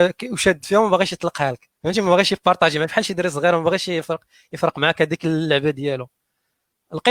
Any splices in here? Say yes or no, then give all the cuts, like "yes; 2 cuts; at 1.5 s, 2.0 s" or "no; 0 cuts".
yes; 1 cut; at 1.8 s